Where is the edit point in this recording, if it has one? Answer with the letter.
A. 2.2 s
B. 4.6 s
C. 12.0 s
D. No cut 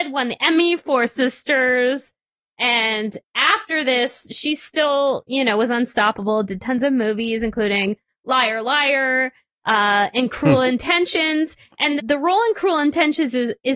C